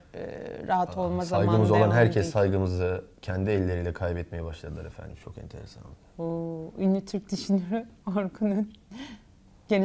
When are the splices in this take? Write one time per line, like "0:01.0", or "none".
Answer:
none

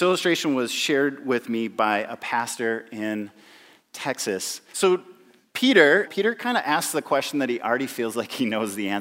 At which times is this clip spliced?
0:04.7
0:06.1

